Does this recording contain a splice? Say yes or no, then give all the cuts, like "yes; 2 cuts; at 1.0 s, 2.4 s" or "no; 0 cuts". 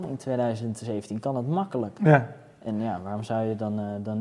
no; 0 cuts